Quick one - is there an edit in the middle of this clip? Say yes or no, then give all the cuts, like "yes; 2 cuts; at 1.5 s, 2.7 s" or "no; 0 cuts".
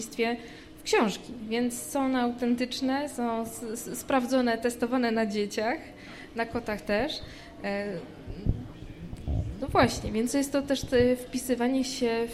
no; 0 cuts